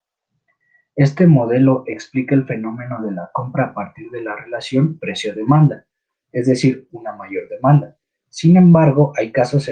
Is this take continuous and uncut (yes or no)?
no